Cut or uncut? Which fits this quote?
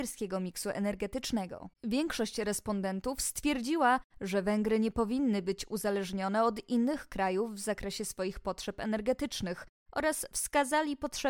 cut